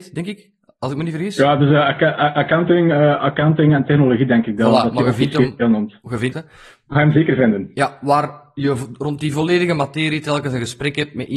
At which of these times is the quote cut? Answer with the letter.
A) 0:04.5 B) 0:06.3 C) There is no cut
B